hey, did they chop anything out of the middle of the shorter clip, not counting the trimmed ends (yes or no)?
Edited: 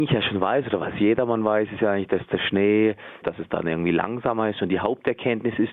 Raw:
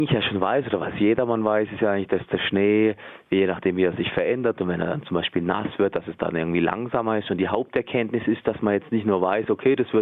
yes